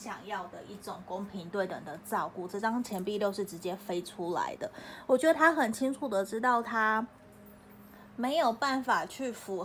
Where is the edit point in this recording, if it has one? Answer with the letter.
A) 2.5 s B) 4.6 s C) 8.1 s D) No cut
D